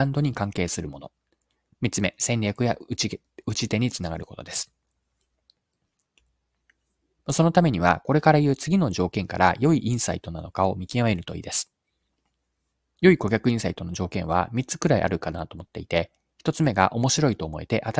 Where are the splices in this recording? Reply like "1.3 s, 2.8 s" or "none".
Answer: 7.2 s